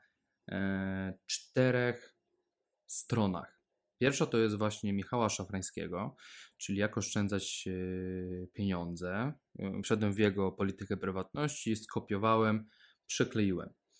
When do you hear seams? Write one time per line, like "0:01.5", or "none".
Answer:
none